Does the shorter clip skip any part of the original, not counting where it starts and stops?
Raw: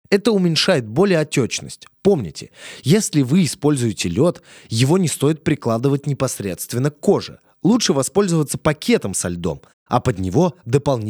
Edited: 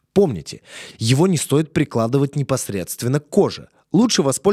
yes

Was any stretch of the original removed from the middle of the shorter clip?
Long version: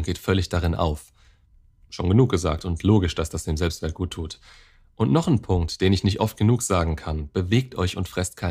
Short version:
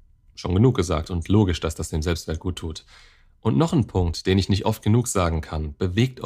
no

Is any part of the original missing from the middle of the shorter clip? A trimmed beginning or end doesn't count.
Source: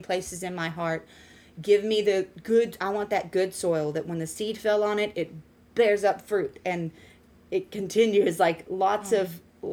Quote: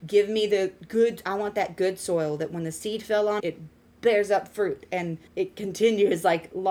yes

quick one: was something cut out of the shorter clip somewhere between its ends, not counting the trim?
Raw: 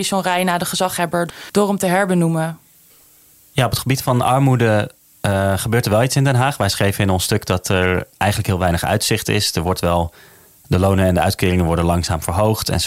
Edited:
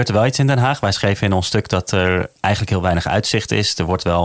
no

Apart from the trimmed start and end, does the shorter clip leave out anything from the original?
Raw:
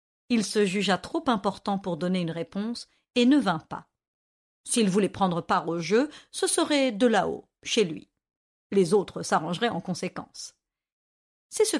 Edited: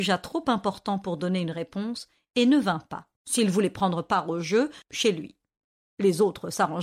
yes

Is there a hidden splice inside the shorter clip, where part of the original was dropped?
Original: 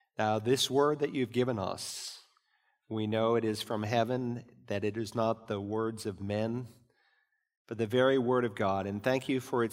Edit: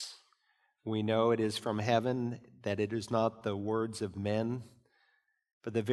no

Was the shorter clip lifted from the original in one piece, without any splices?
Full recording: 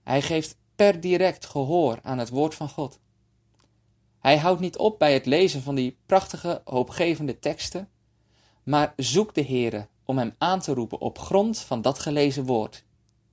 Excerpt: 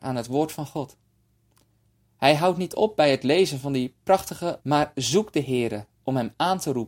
no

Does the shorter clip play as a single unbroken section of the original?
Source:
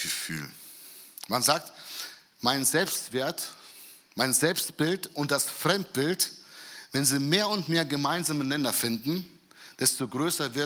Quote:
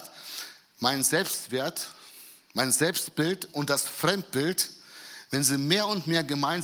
yes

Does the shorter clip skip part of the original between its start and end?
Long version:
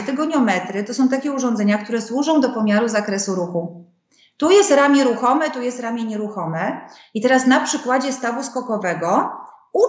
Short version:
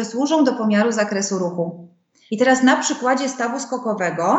yes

